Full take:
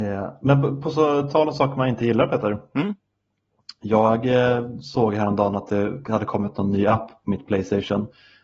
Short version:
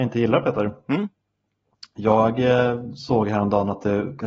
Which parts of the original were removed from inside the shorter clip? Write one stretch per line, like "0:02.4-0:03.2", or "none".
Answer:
none